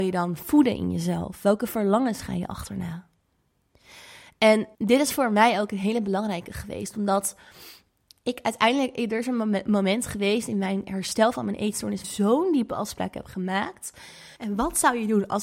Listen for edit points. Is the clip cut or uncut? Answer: cut